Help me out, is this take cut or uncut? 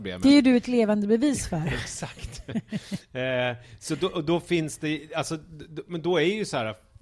uncut